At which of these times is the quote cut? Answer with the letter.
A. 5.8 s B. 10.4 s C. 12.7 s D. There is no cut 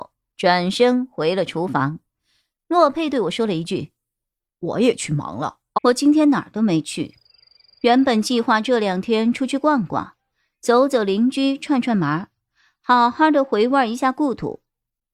A